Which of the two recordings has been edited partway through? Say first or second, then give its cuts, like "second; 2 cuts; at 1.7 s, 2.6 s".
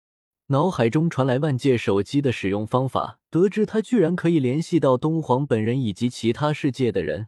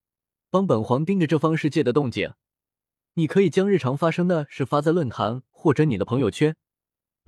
first; 1 cut; at 3.3 s